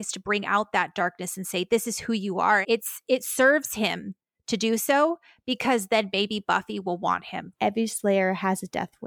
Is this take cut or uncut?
cut